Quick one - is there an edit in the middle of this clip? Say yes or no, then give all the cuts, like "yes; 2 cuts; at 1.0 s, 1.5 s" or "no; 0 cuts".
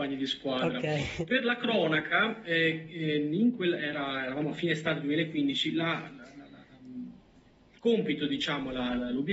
no; 0 cuts